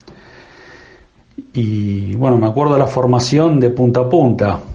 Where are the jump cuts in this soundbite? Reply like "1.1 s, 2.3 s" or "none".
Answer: none